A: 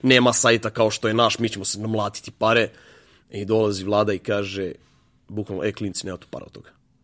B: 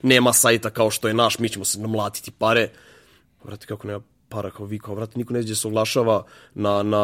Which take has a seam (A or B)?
B